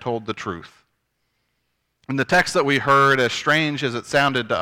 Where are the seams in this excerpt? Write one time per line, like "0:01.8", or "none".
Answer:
0:02.0